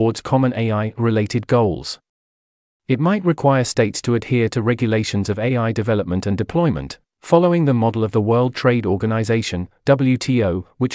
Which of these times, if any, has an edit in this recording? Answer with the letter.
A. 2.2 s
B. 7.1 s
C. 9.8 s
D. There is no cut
D